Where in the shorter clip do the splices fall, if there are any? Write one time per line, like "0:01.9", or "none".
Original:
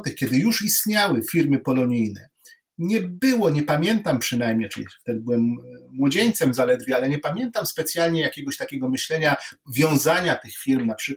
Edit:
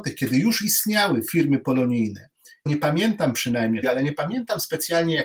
0:02.7
0:03.8

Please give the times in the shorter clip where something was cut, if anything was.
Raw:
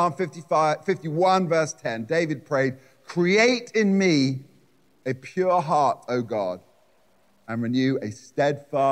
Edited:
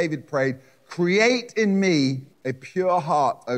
0:02.3

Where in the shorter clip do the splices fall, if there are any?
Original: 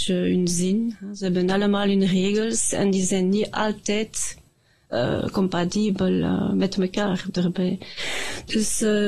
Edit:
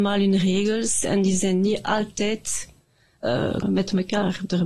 0:03.6

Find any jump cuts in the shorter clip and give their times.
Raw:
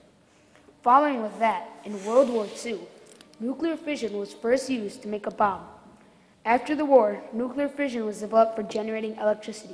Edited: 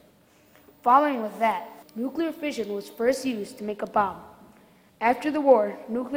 0:01.8

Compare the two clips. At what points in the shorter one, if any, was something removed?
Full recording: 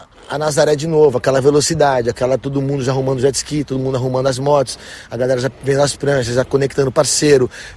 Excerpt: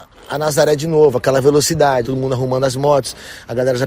0:02.0

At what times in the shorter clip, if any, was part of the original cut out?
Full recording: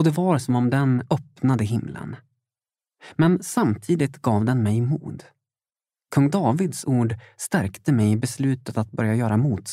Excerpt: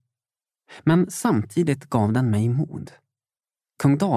none

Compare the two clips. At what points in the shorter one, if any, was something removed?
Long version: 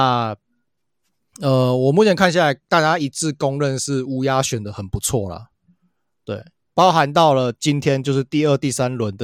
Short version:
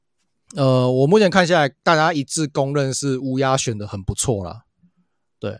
none

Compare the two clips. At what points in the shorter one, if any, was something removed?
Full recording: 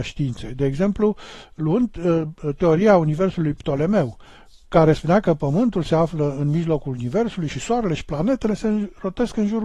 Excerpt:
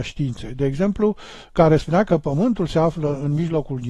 0:01.5

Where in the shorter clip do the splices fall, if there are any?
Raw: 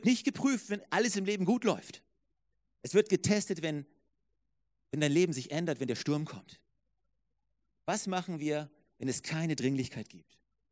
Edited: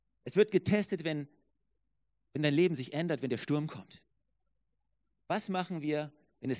none

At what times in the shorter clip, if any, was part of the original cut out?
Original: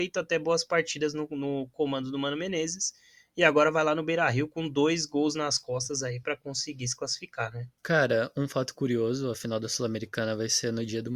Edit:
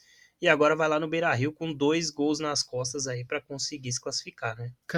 none

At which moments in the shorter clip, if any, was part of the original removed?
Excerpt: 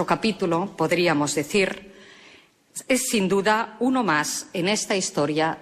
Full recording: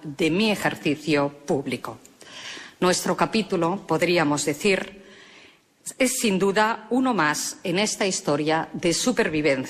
none

